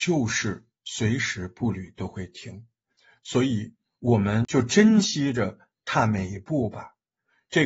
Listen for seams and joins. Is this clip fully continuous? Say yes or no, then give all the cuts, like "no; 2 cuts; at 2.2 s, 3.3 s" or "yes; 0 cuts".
yes; 0 cuts